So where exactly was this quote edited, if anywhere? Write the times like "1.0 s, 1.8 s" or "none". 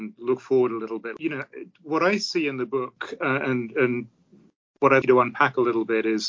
5.0 s